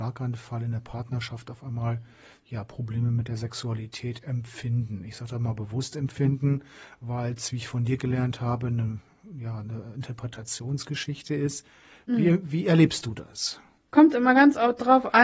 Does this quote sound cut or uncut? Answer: uncut